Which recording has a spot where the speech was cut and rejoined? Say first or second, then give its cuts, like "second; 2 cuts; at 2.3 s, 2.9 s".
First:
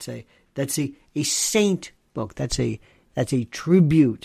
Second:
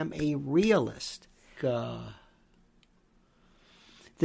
second; 1 cut; at 1.6 s